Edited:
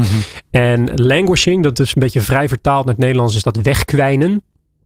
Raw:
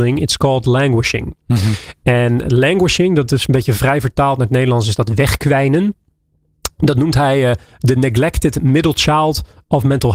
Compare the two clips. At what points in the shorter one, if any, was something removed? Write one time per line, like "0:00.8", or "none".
none